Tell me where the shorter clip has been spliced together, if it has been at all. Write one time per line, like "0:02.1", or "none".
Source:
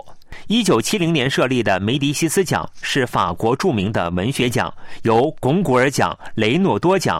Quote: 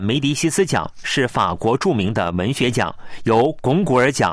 none